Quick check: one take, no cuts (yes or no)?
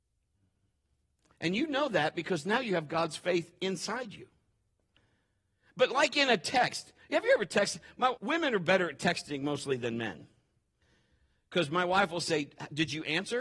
no